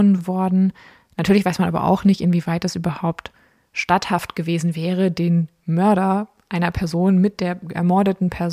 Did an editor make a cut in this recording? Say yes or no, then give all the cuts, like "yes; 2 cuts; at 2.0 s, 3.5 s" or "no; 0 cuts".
no; 0 cuts